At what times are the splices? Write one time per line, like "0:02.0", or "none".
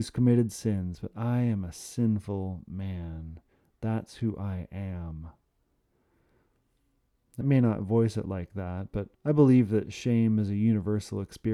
0:07.4
0:09.1

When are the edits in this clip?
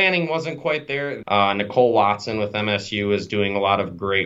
0:01.2

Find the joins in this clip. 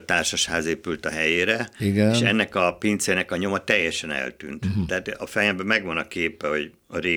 none

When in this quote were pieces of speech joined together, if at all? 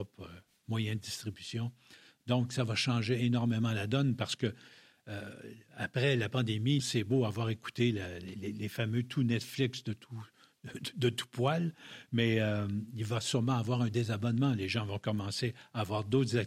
0:06.8

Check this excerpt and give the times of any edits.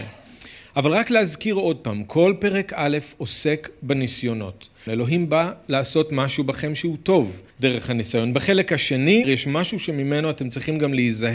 0:04.9
0:07.5
0:09.2

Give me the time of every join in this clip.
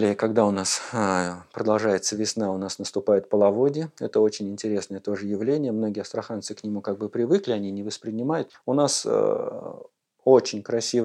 0:08.5

